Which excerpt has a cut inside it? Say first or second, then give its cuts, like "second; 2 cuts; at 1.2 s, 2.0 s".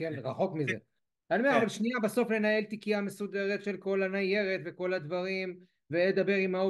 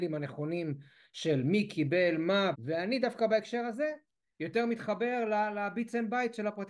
second; 1 cut; at 2.5 s